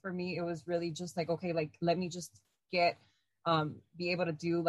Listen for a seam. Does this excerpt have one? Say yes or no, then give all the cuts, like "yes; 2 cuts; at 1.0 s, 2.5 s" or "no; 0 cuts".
no; 0 cuts